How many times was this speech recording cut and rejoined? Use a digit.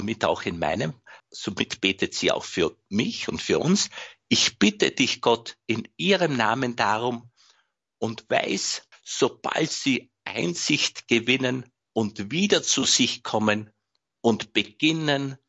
2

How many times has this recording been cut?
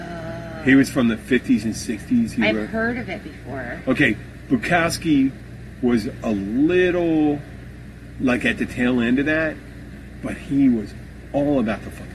0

